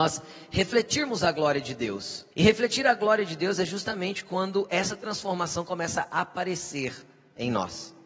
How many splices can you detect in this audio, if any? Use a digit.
1